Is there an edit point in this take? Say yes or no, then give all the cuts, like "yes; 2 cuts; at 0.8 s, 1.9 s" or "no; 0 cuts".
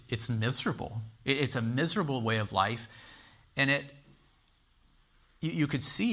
no; 0 cuts